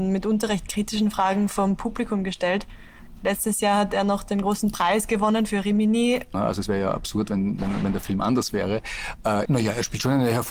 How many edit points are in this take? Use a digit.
2